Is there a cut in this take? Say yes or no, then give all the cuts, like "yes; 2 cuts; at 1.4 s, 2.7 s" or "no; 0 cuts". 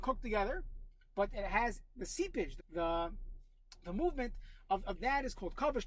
yes; 2 cuts; at 2.6 s, 4.9 s